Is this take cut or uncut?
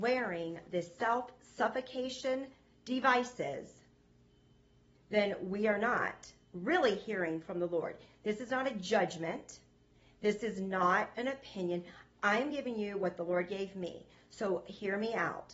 uncut